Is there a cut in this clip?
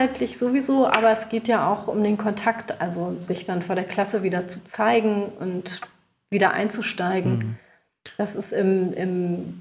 no; 0 cuts

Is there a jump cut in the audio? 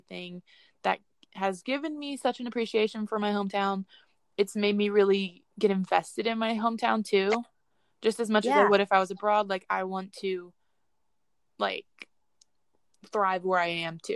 no; 0 cuts

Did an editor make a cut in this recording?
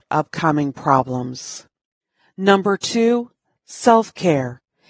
no; 0 cuts

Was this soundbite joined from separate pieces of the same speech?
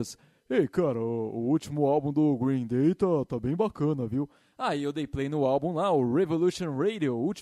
no; 0 cuts

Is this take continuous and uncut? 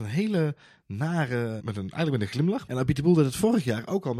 no; 2 cuts; at 1.6 s, 2.7 s

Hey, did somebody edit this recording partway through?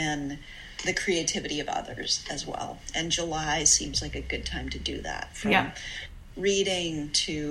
no; 0 cuts

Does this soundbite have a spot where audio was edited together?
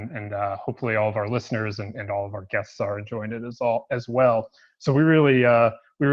no; 0 cuts

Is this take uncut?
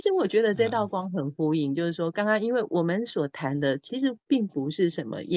yes; 0 cuts

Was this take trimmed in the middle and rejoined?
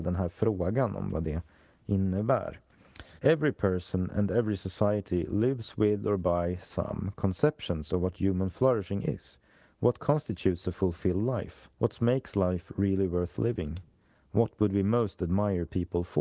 yes; 2 cuts; at 3.2 s, 11.7 s

